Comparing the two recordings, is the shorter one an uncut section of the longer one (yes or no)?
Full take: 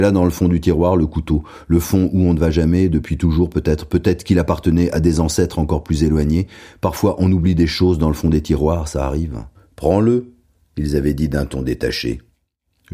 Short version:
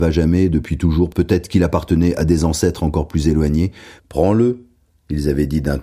no